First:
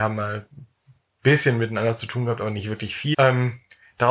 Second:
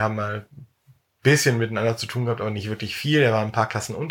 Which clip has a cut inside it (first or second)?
first